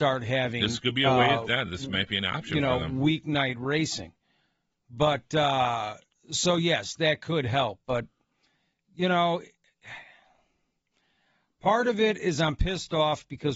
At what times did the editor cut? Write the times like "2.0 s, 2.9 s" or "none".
none